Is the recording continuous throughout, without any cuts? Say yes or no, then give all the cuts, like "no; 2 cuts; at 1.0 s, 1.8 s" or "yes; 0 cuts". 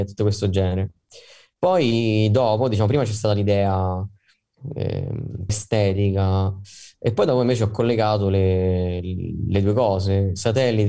no; 1 cut; at 5.5 s